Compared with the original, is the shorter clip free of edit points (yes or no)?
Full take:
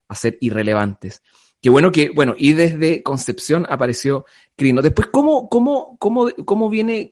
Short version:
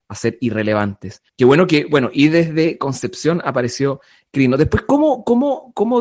no